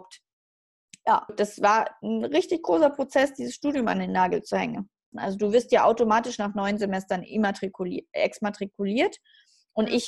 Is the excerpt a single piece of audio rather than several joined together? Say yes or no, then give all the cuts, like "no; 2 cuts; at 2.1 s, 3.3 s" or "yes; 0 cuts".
no; 2 cuts; at 1.3 s, 5.1 s